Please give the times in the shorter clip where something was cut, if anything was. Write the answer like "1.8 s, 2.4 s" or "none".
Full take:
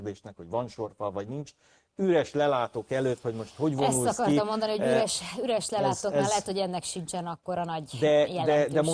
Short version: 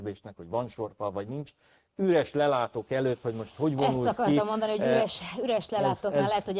none